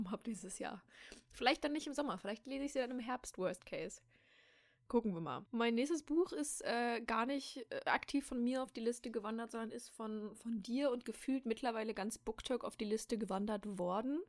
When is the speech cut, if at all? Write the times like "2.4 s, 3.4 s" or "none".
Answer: none